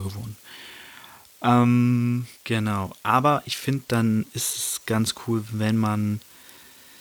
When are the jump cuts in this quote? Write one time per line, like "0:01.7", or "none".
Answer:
0:02.3

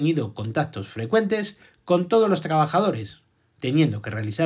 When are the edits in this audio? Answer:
0:03.4

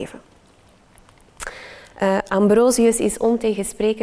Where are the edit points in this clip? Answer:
0:01.9

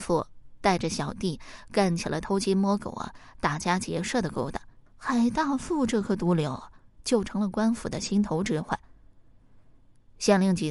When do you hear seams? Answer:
0:04.9

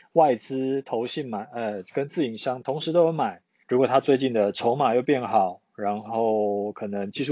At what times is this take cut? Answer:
0:03.6

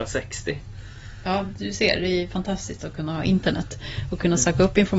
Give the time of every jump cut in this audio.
none

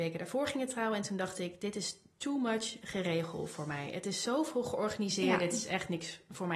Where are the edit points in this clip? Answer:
none

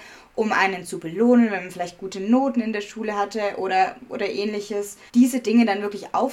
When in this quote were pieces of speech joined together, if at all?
0:05.1

